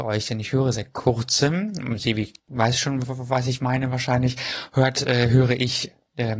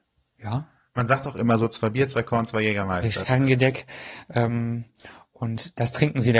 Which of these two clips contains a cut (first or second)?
second